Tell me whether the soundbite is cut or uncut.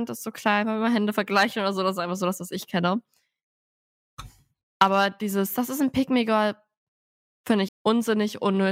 cut